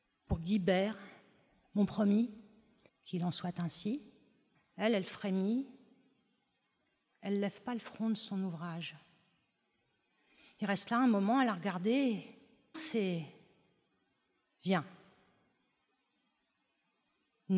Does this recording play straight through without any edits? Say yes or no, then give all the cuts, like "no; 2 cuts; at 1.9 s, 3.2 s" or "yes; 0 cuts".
no; 3 cuts; at 2.9 s, 4.5 s, 12.7 s